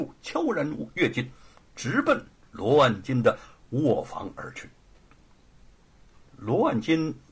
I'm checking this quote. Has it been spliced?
no; 0 cuts

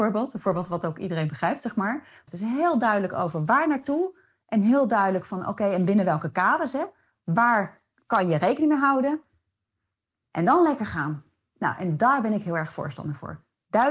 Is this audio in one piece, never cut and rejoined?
no; 1 cut; at 2.3 s

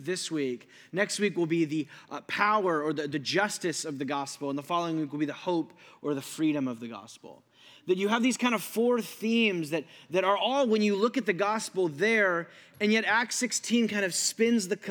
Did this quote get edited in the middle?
no; 0 cuts

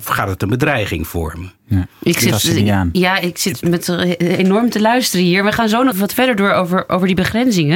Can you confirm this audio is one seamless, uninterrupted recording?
no; 1 cut; at 5.9 s

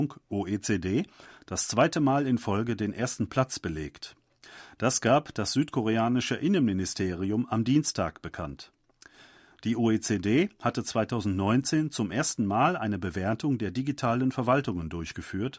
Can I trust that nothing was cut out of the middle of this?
yes; 0 cuts

